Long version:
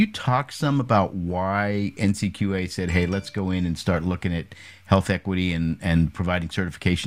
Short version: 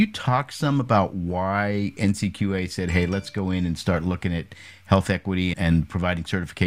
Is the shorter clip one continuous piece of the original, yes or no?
no